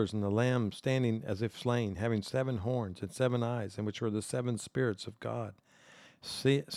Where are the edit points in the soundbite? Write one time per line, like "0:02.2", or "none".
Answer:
none